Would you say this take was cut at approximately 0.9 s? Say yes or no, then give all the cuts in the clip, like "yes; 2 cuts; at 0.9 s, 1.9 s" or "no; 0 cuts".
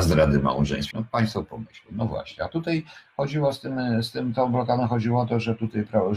yes; 1 cut; at 0.9 s